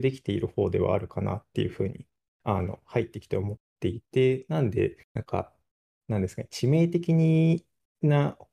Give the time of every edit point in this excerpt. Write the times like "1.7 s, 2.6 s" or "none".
3.6 s, 5.0 s